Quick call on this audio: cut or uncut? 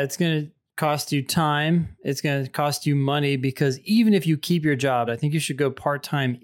cut